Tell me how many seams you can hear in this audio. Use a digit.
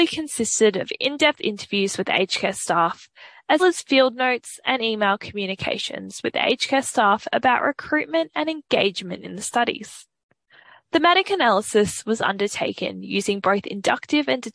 1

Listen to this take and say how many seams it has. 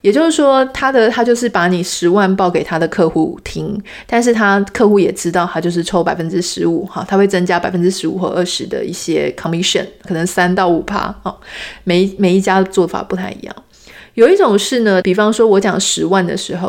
2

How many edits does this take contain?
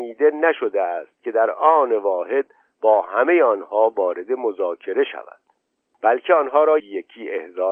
1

